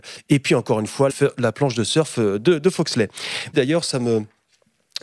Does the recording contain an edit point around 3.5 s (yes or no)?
yes